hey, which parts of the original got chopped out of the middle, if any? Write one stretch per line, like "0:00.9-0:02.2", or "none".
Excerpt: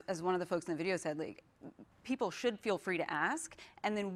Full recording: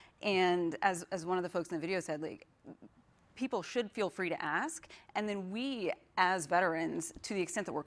0:02.9-0:03.2

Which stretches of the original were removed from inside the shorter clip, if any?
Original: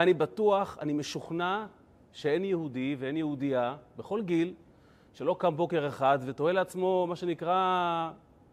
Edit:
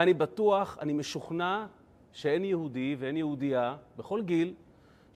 none

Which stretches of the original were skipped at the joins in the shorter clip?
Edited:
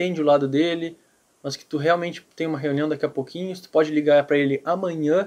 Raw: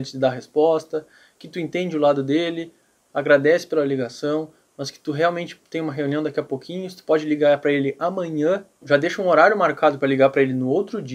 0:03.0-0:04.6

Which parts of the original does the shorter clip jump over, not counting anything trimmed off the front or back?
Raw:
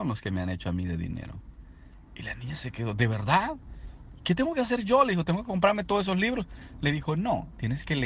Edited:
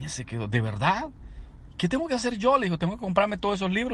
none

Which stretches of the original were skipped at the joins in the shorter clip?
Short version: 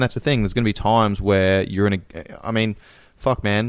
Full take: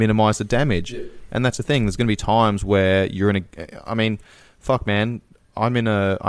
none

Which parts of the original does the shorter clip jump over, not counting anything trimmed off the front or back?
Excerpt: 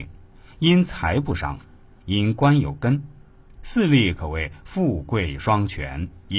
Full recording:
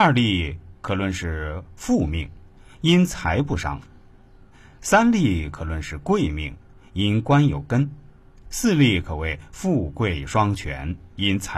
0:04.2-0:06.9

